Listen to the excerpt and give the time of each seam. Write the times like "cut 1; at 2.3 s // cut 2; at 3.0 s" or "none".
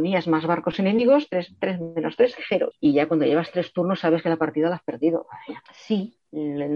cut 1; at 1.3 s // cut 2; at 2.7 s // cut 3; at 5.7 s